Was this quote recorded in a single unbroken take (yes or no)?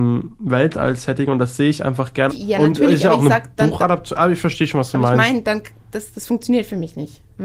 no